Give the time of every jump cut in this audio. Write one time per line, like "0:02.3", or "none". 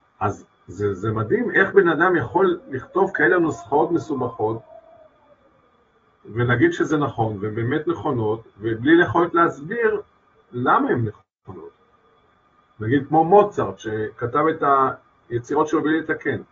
none